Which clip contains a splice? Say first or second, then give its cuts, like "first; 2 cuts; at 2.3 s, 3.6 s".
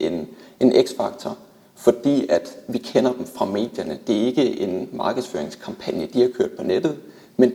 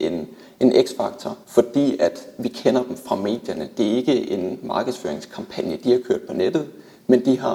second; 1 cut; at 1.4 s